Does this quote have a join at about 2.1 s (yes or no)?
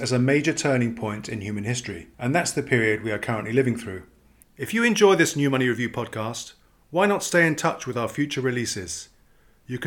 yes